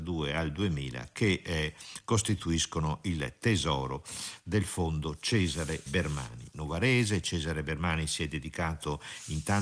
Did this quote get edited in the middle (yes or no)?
yes